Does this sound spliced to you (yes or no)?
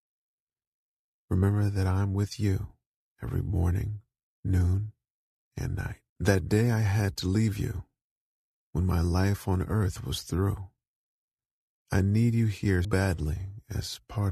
yes